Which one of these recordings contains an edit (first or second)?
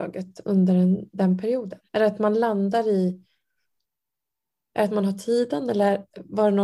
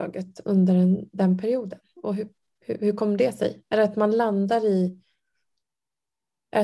first